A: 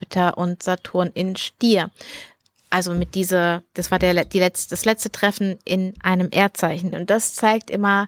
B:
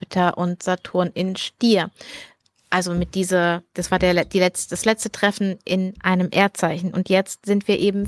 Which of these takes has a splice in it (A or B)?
A